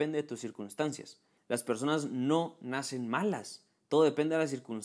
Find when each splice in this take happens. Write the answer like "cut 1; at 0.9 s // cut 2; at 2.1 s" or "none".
cut 1; at 1.4 s